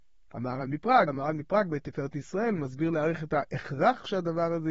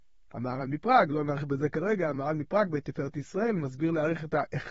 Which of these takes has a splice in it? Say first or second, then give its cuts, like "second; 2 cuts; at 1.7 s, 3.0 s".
first; 1 cut; at 1.1 s